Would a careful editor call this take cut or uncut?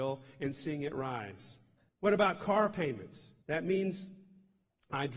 cut